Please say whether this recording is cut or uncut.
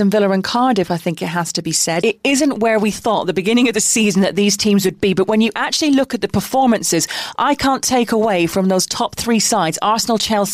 cut